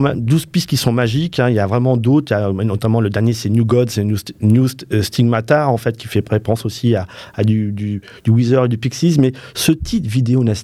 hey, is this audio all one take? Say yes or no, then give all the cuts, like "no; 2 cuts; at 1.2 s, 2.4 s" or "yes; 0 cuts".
yes; 0 cuts